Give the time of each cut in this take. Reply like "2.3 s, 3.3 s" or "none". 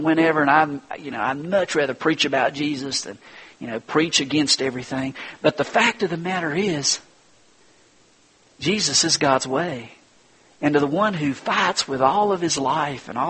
none